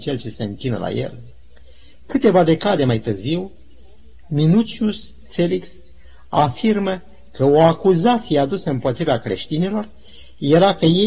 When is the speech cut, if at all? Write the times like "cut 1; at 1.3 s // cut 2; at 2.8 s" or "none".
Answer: none